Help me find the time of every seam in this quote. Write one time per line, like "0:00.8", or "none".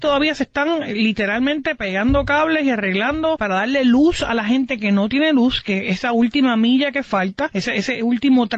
none